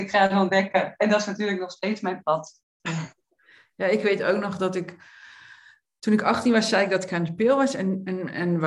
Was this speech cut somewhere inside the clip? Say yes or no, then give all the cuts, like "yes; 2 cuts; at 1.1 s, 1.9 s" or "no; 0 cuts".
no; 0 cuts